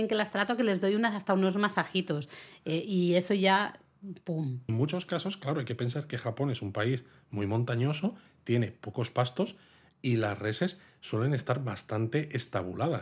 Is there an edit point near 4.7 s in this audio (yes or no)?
yes